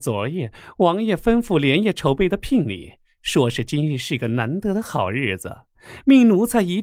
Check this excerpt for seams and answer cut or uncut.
uncut